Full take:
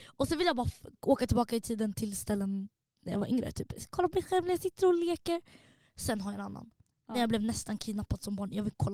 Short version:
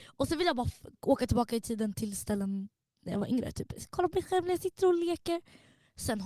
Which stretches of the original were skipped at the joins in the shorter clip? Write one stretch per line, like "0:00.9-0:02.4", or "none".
none